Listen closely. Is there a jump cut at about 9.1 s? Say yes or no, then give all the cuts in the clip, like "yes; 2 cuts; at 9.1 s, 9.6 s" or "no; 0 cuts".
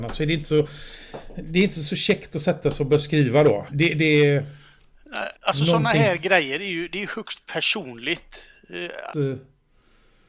yes; 3 cuts; at 3.7 s, 5.4 s, 9.1 s